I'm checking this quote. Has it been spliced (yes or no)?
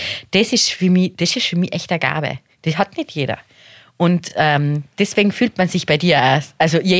no